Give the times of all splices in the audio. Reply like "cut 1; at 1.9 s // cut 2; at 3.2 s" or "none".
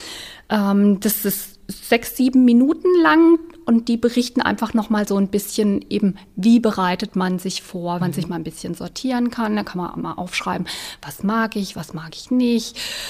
cut 1; at 8.0 s